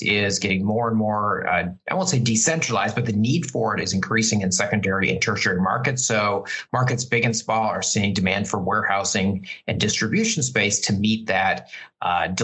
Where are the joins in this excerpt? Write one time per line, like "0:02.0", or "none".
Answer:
none